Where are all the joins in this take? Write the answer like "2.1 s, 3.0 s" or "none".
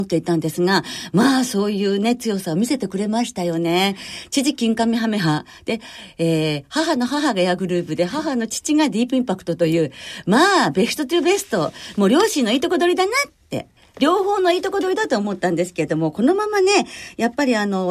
none